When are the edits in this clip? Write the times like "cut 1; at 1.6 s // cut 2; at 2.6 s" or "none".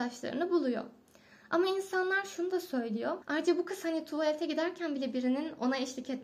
cut 1; at 3.2 s